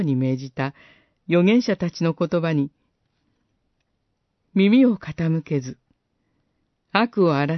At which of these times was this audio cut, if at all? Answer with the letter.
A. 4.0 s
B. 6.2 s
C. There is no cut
C